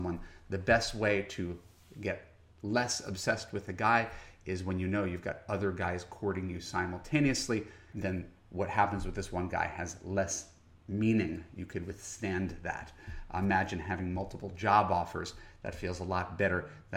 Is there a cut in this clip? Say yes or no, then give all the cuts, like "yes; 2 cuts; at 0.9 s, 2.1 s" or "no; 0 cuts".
no; 0 cuts